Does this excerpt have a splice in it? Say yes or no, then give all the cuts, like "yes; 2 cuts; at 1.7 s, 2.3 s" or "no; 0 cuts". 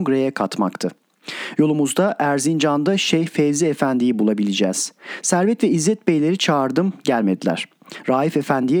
yes; 1 cut; at 1.6 s